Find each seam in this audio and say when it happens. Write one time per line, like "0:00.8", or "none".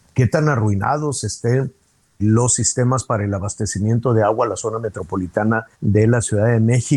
0:02.2
0:05.7